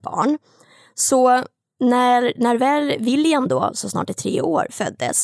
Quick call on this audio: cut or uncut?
uncut